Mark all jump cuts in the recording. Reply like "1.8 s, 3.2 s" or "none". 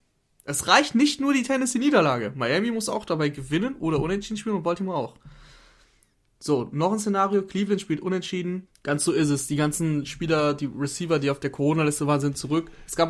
8.7 s